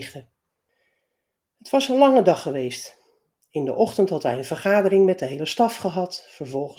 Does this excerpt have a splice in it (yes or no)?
no